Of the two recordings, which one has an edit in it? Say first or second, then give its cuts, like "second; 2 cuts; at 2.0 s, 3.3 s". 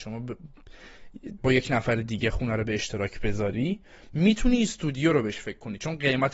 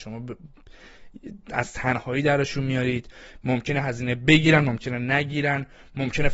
first; 1 cut; at 1.4 s